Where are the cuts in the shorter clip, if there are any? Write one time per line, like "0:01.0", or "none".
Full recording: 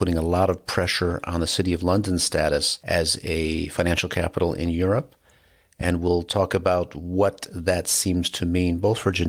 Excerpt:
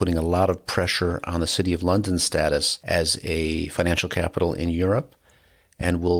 none